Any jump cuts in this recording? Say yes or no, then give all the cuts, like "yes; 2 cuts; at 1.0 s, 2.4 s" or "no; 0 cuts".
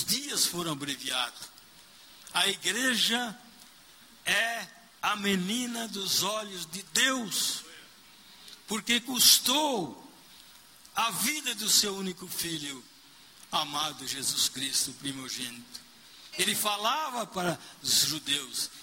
yes; 2 cuts; at 16.3 s, 17.8 s